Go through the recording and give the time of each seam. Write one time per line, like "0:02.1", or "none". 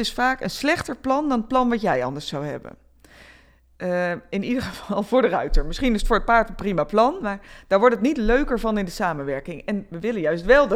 none